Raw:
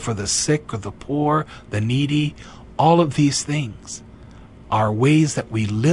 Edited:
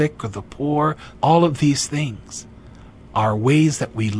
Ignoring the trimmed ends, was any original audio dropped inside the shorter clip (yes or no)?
yes